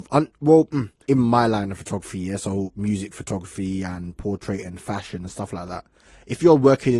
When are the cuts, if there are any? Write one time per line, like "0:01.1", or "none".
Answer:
0:01.1